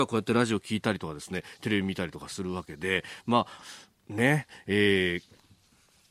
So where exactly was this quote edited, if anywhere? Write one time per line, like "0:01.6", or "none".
0:03.6